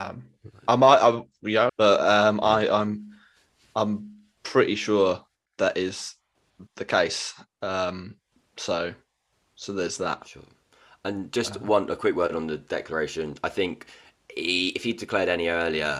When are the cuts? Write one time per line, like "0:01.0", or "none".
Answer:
0:01.7
0:06.7